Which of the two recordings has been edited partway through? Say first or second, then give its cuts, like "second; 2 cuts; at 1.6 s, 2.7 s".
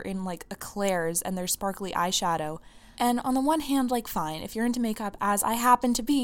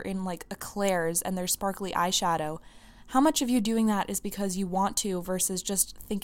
first; 1 cut; at 2.9 s